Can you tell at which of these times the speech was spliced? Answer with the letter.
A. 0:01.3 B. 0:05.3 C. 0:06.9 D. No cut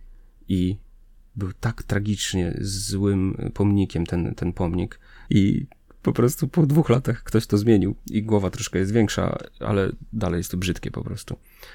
B